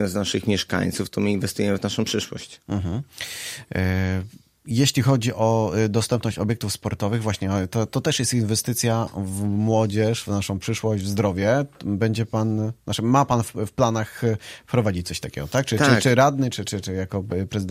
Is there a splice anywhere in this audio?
no; 0 cuts

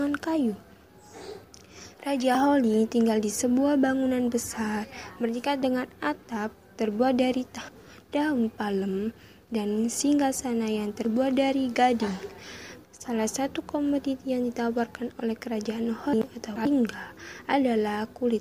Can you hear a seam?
yes; 1 cut; at 12.8 s

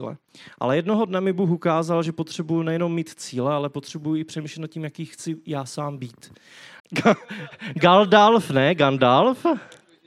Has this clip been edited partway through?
yes; 1 cut; at 6.8 s

